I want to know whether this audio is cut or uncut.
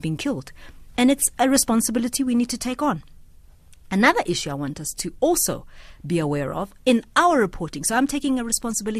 uncut